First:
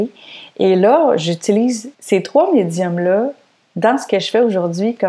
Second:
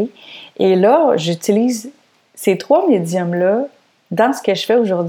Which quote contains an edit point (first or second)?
first